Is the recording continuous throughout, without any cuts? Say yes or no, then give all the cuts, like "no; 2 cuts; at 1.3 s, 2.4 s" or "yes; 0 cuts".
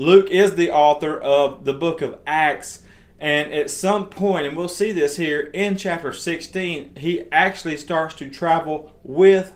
yes; 0 cuts